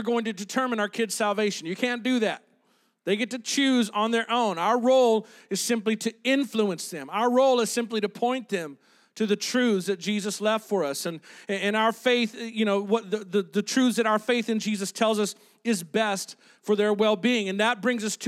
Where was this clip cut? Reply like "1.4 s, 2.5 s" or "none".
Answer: none